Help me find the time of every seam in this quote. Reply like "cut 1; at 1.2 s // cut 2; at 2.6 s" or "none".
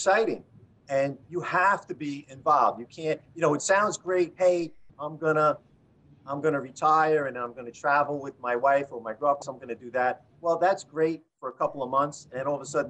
cut 1; at 9.4 s